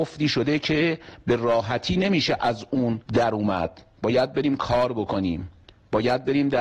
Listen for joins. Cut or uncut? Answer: cut